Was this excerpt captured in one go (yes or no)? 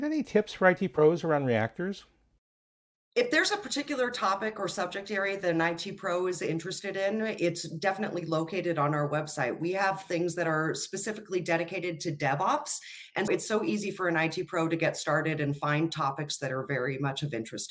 no